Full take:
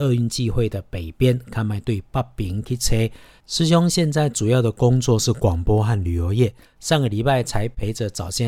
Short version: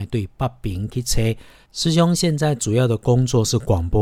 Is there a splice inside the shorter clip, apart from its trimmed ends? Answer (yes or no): no